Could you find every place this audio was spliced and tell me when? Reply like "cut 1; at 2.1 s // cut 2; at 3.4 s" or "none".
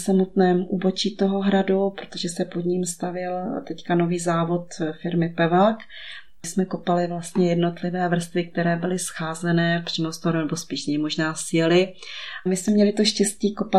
cut 1; at 12.5 s